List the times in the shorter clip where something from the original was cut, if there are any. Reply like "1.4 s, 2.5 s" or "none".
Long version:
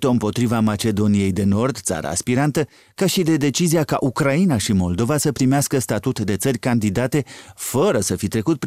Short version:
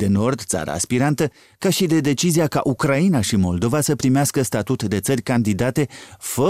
none